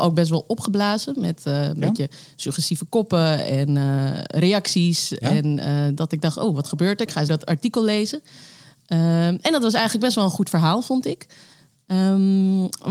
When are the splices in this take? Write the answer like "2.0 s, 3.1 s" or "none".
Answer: 7.3 s